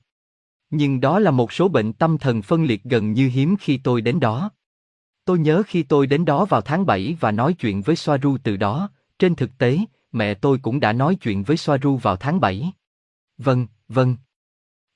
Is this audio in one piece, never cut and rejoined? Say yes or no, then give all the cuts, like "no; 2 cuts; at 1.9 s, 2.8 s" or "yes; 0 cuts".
no; 1 cut; at 13.2 s